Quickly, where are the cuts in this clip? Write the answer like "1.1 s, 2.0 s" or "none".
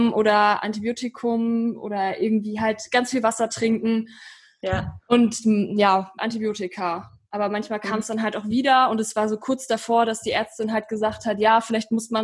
6.2 s